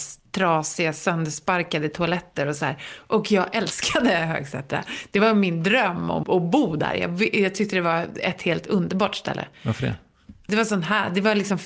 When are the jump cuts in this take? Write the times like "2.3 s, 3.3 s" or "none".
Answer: 6.2 s, 10.5 s